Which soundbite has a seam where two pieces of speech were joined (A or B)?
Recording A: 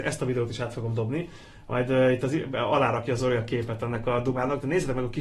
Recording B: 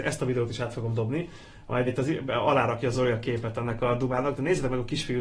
B